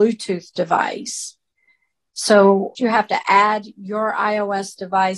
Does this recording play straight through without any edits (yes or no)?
no